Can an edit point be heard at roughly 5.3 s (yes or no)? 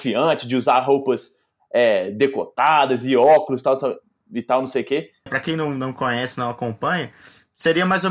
yes